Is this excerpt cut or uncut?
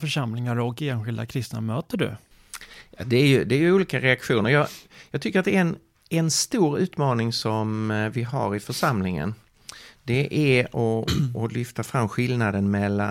uncut